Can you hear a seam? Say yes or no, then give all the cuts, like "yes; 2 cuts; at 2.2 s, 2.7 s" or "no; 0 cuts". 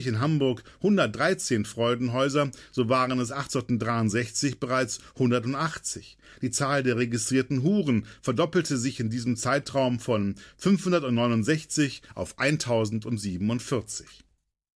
no; 0 cuts